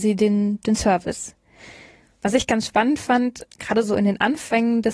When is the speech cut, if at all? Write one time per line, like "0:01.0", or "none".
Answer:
0:03.5